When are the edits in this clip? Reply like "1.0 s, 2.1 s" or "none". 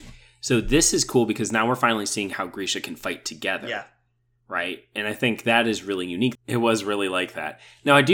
6.3 s